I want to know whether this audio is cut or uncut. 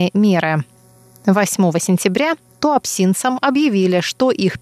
uncut